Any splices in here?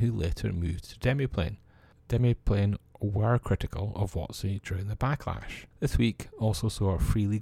yes; 1 cut; at 5.7 s

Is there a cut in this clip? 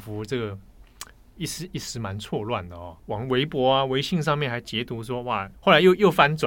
yes; 2 cuts; at 3.0 s, 5.5 s

